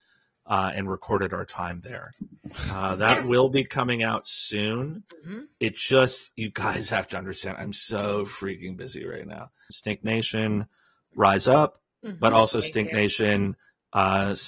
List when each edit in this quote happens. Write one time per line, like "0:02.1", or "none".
0:09.7

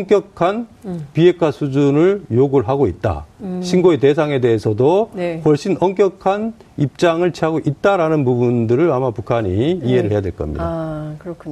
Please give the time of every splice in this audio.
none

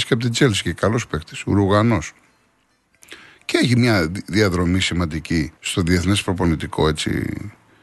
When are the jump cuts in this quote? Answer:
0:05.6

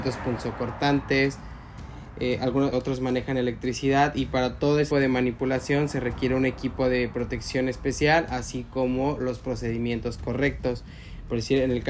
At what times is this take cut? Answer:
0:02.7
0:04.9

